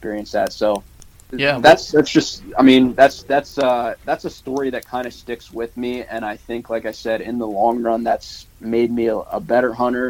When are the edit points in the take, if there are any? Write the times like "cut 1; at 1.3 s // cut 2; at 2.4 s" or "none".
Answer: none